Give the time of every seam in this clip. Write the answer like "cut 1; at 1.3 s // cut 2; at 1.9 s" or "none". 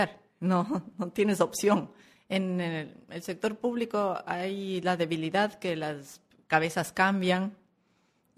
cut 1; at 2.2 s